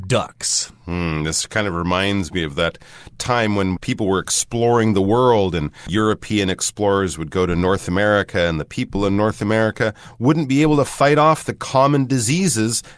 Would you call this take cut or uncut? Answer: uncut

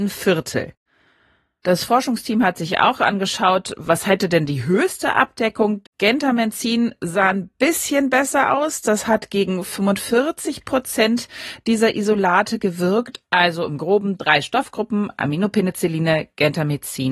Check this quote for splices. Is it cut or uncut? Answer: cut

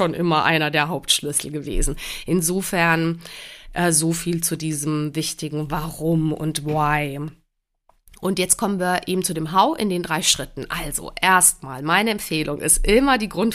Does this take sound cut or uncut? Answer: uncut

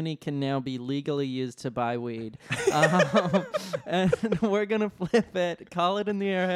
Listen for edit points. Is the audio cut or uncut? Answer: uncut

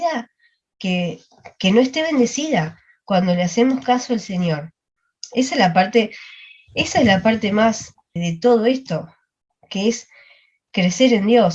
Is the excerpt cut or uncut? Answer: cut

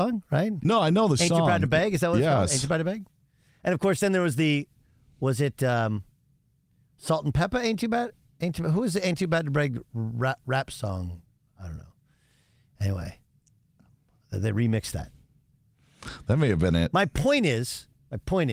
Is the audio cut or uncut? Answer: uncut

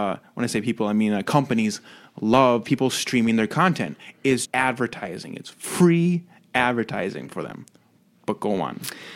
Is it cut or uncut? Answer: cut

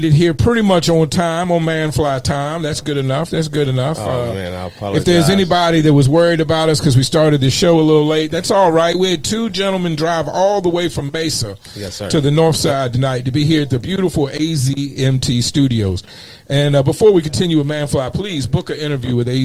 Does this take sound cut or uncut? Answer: uncut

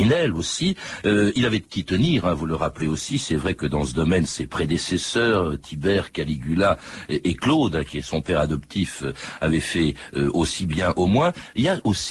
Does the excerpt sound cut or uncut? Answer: uncut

